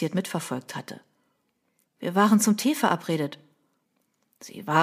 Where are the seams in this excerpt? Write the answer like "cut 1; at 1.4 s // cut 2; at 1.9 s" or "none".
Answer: cut 1; at 1.9 s